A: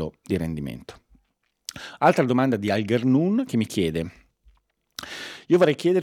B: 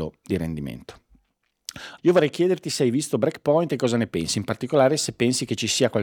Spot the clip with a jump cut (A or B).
B